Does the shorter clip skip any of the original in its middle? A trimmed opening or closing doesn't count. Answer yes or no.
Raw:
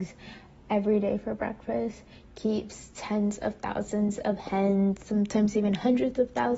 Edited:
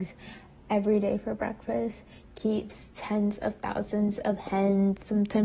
no